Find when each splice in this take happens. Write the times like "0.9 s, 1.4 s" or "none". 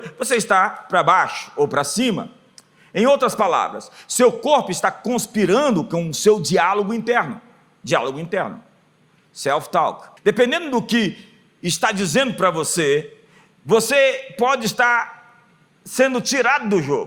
10.2 s